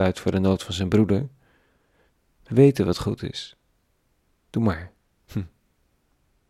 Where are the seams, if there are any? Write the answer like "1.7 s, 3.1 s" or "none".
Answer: none